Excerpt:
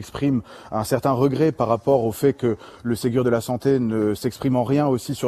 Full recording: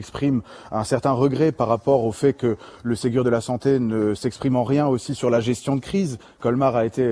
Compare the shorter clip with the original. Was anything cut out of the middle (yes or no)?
no